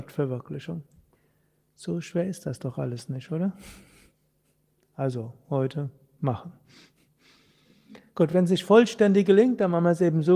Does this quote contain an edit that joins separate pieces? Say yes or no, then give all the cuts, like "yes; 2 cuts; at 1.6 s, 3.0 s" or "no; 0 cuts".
no; 0 cuts